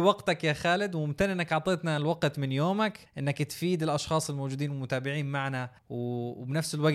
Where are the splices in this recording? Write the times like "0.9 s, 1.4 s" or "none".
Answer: 3.1 s, 5.8 s

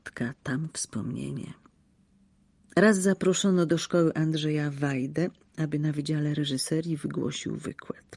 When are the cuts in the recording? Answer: none

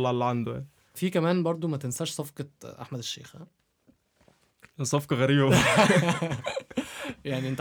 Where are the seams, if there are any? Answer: 1.0 s

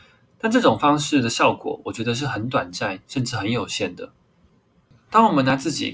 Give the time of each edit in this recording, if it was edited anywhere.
none

